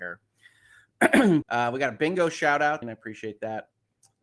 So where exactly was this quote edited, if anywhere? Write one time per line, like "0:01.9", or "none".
0:01.4
0:02.8